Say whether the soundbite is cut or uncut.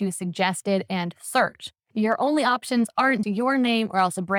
cut